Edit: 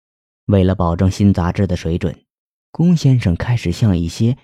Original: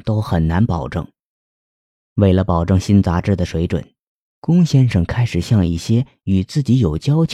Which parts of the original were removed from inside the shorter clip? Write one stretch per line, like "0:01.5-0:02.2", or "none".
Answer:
none